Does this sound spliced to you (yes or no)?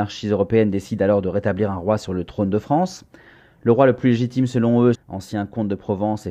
yes